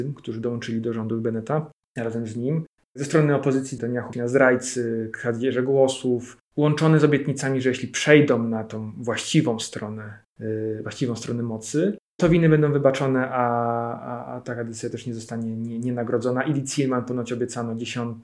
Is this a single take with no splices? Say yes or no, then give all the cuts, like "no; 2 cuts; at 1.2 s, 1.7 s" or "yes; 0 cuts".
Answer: yes; 0 cuts